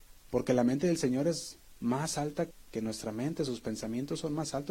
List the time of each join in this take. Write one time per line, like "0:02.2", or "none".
0:02.5